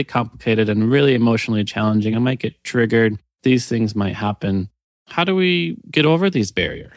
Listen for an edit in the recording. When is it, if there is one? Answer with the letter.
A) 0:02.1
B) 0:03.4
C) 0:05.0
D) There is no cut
D